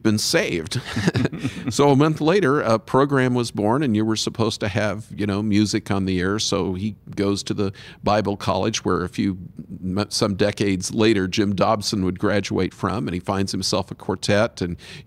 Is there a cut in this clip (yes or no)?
no